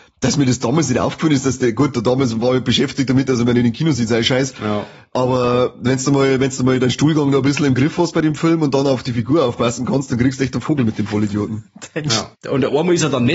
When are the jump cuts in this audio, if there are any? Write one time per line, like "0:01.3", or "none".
0:12.3